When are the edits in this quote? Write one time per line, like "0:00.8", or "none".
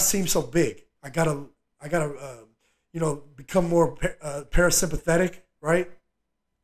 0:01.0